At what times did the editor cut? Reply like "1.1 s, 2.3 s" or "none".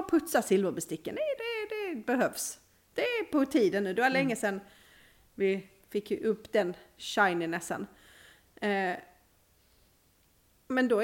1.4 s